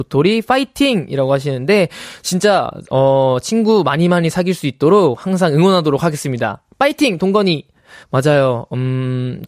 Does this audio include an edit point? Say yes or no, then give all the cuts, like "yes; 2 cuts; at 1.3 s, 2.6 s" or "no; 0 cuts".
yes; 1 cut; at 8.0 s